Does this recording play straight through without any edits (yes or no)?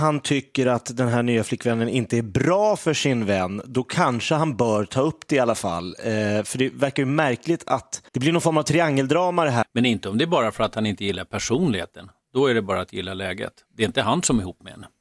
no